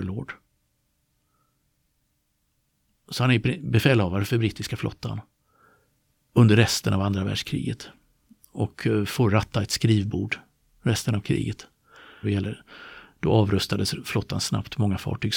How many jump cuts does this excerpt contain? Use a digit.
1